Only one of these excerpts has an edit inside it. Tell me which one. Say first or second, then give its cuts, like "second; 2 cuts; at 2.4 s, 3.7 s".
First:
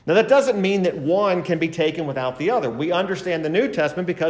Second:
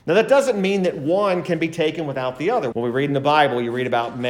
second; 1 cut; at 2.7 s